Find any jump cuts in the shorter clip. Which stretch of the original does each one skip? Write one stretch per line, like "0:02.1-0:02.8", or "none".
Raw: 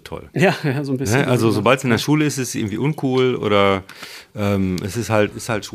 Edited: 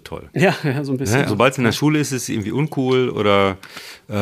0:01.3-0:01.5